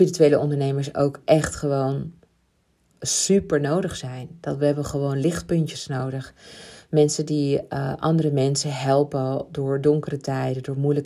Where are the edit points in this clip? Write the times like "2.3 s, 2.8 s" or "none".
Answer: none